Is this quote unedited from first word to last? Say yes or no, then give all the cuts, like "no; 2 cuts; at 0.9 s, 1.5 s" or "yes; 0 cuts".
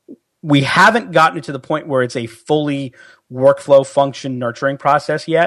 yes; 0 cuts